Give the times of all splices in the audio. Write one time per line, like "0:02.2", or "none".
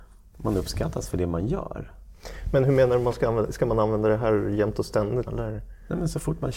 0:05.3